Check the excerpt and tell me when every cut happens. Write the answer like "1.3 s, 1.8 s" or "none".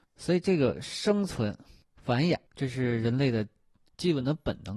2.5 s

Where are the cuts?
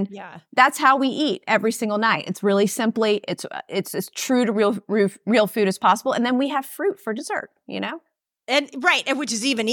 none

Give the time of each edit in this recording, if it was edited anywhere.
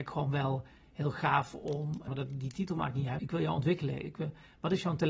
2.1 s, 3.2 s

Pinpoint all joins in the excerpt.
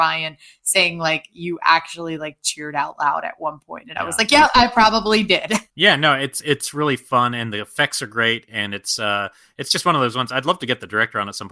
5.7 s

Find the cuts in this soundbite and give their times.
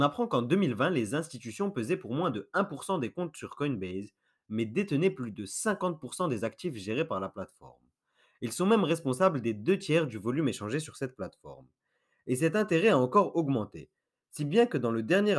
none

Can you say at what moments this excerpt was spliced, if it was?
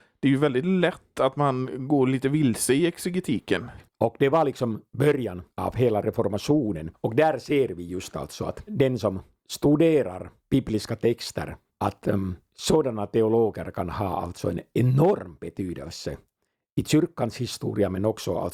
3.9 s

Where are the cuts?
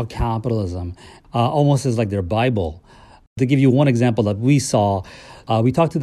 none

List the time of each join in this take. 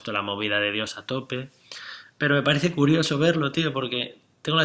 none

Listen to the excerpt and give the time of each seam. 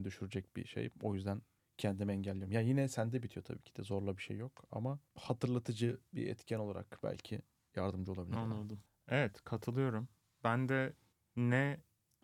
none

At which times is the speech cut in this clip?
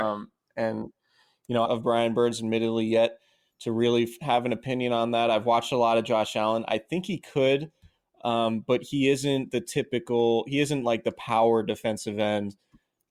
1.7 s

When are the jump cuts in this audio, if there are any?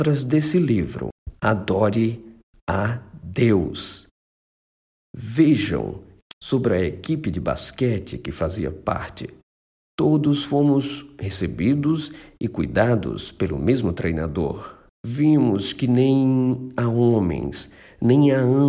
6.3 s, 14.9 s

